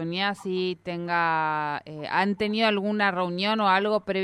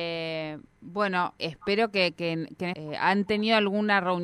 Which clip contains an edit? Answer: second; 2 cuts; at 1.4 s, 2.7 s

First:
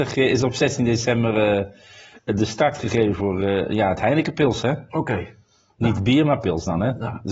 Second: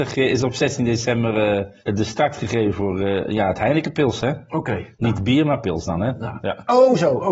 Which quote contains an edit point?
second; 3 cuts; at 1.8 s, 4.9 s, 6.4 s

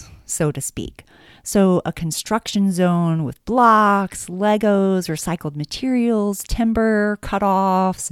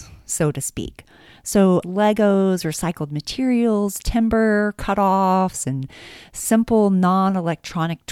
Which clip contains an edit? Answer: second; 1 cut; at 1.8 s

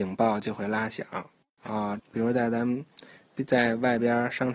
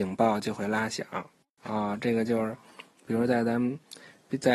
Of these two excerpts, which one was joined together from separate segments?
first; 1 cut; at 2.0 s

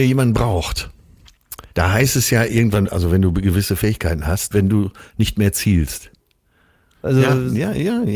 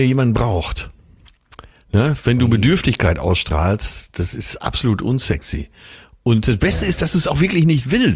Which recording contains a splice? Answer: first; 3 cuts; at 1.7 s, 4.5 s, 6.9 s

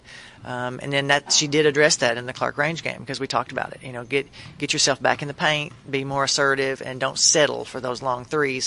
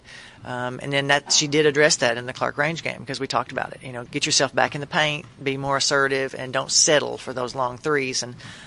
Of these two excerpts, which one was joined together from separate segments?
second; 1 cut; at 4.1 s

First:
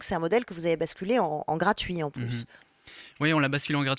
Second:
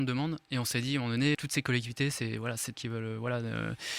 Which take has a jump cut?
second; 2 cuts; at 1.3 s, 2.7 s

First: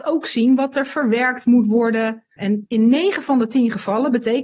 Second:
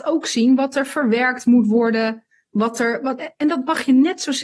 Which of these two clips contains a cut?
first; 1 cut; at 2.4 s

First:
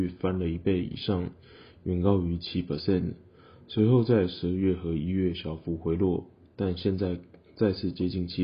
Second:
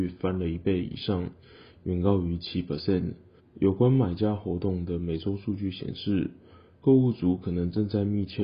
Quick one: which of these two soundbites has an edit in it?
second; 1 cut; at 3.4 s

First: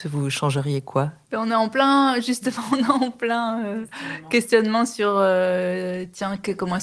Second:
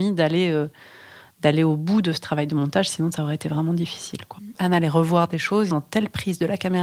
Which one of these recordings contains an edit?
second; 2 cuts; at 4.5 s, 5.7 s

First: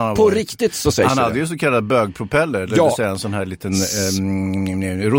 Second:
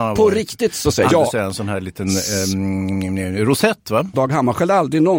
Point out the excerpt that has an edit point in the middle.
second; 2 cuts; at 1.1 s, 4.1 s

